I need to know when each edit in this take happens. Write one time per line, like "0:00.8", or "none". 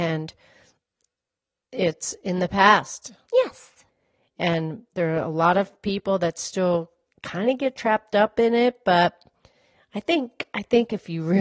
0:03.3